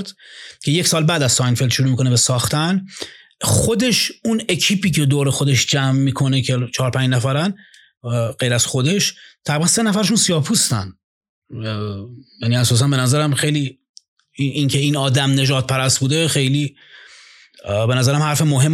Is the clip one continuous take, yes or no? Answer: yes